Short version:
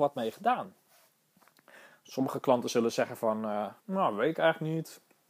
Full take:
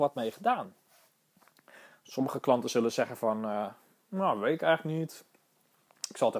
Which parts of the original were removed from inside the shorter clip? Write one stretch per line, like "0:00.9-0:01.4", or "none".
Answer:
0:03.8-0:04.0